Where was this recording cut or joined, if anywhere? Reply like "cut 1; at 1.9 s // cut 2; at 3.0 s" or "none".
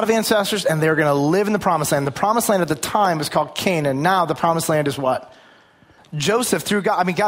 cut 1; at 6.0 s